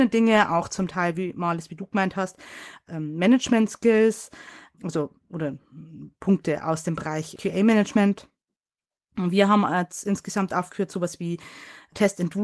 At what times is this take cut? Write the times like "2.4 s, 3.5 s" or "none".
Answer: none